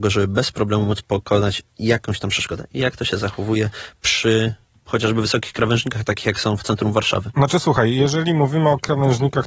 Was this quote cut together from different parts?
no; 0 cuts

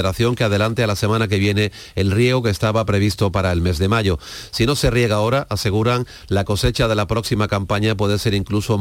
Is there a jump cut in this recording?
yes; 1 cut; at 4.5 s

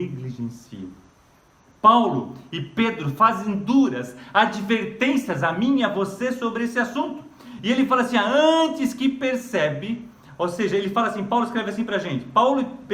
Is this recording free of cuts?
yes; 0 cuts

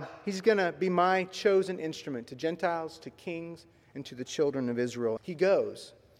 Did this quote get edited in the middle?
yes; 1 cut; at 5.2 s

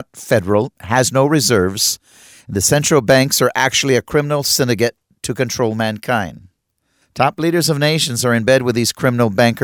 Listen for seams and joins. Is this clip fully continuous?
yes; 0 cuts

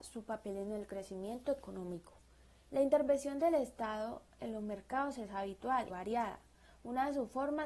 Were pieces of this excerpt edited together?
yes; 2 cuts; at 2.6 s, 5.9 s

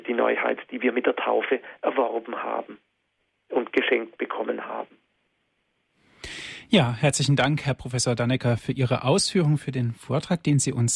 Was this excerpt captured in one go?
yes; 0 cuts

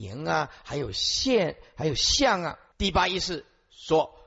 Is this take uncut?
no; 1 cut; at 2.7 s

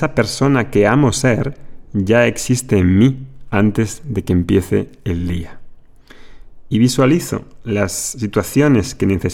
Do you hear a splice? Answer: no; 0 cuts

